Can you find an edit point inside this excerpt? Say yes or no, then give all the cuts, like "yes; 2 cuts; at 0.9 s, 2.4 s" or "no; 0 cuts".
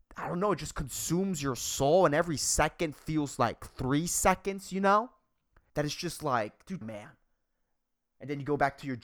yes; 2 cuts; at 5.7 s, 6.8 s